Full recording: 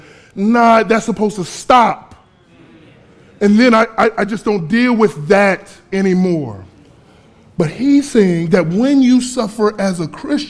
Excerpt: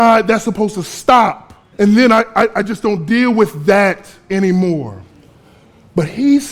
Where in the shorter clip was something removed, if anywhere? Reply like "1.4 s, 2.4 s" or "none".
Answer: 1.7 s